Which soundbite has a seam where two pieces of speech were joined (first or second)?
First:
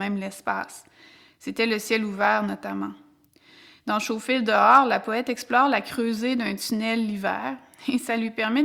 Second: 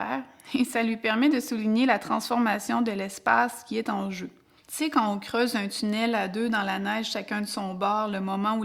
second